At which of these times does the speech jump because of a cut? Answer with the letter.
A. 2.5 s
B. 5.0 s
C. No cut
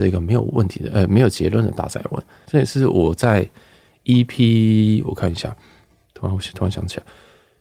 A